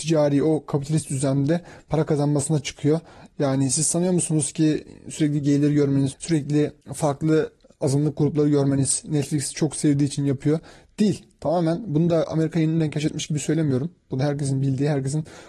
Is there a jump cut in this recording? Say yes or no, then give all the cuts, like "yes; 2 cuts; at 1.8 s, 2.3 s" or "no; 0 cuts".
yes; 1 cut; at 6.1 s